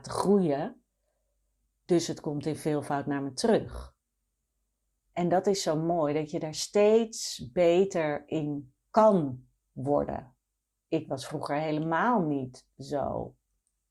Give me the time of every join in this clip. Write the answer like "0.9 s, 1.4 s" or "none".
5.0 s

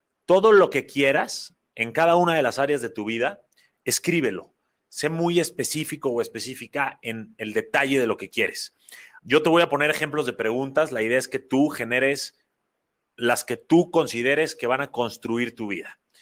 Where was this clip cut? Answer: 9.2 s

